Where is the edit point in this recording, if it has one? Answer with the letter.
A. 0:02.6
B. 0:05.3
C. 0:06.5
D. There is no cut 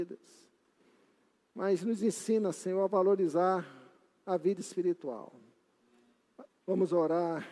C